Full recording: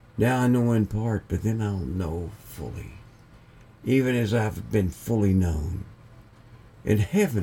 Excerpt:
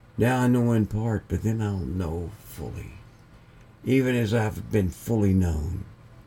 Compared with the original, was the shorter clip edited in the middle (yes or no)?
no